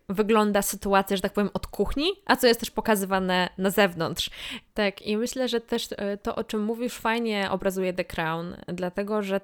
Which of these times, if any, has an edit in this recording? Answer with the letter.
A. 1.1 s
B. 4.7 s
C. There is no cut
B